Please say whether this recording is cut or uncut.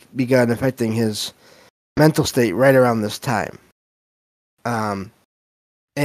cut